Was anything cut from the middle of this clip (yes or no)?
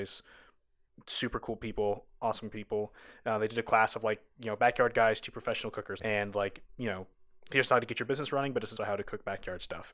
yes